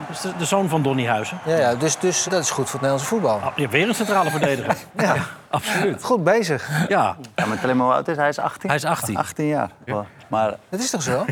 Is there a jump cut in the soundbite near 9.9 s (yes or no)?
yes